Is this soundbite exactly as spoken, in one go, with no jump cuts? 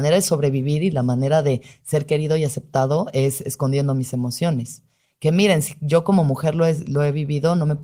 yes; 0 cuts

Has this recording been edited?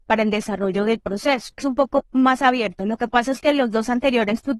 no; 0 cuts

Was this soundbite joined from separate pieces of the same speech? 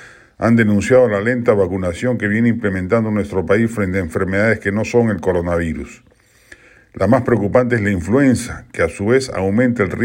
no; 0 cuts

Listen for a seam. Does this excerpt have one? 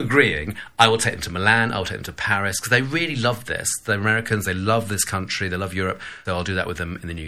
yes; 1 cut; at 6.3 s

